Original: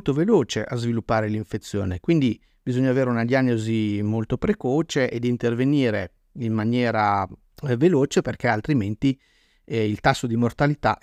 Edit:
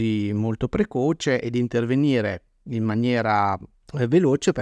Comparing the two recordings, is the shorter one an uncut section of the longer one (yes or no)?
yes